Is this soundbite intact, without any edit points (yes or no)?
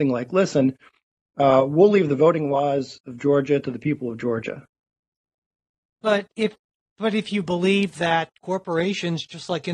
yes